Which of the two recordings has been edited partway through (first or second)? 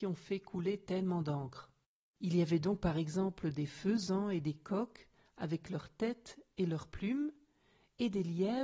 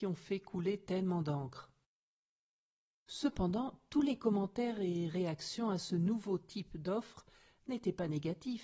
first